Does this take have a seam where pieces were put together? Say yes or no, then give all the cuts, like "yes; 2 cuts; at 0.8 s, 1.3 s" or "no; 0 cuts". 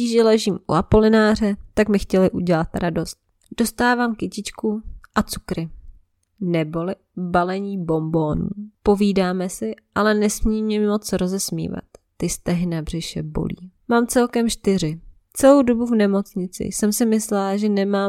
yes; 2 cuts; at 13.8 s, 15.2 s